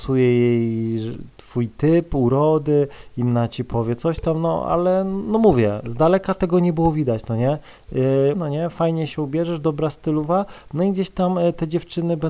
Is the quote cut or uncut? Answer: cut